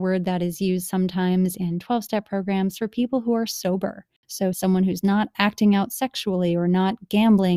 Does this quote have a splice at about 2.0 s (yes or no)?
no